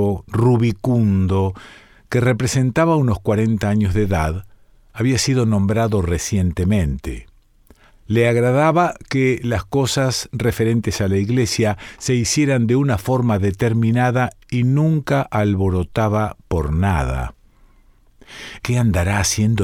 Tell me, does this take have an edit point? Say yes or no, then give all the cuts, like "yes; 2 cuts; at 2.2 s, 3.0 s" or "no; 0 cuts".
yes; 2 cuts; at 7.9 s, 18.6 s